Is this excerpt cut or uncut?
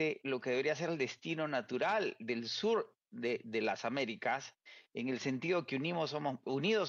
uncut